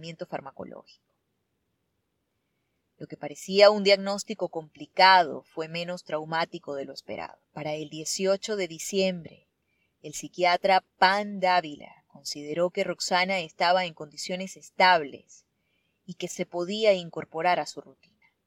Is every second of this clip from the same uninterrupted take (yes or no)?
no